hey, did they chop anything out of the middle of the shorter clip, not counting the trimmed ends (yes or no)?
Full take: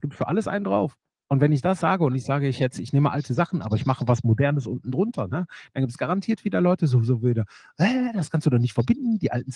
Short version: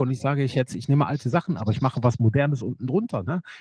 no